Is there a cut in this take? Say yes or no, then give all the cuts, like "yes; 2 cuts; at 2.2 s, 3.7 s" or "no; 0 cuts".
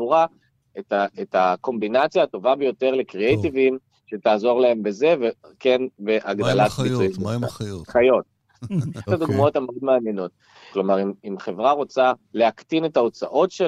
yes; 3 cuts; at 9.1 s, 10.7 s, 12.2 s